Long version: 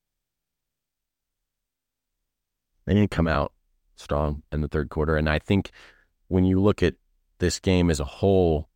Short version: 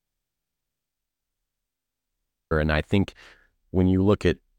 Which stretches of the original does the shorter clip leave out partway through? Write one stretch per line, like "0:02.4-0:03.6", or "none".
0:02.5-0:05.1